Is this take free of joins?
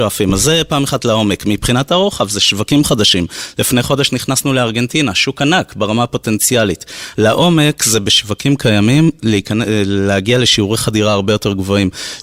no; 1 cut; at 7.1 s

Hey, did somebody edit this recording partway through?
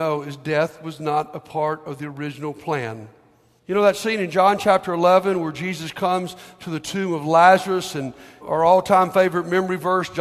yes; 2 cuts; at 3.6 s, 8.4 s

